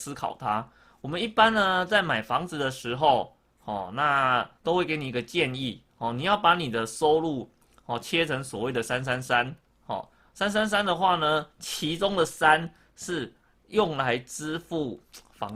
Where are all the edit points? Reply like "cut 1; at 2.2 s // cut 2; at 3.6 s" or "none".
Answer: cut 1; at 4.6 s